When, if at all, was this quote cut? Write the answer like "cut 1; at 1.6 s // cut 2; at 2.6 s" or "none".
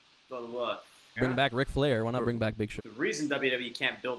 cut 1; at 1.2 s // cut 2; at 2.8 s